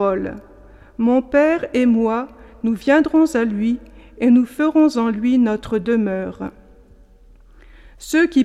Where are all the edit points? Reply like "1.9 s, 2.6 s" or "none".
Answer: none